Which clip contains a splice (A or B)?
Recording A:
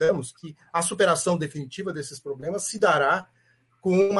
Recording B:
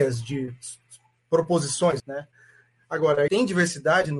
B